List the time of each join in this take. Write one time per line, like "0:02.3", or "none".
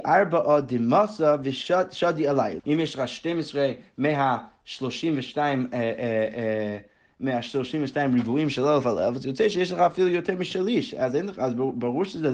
0:02.6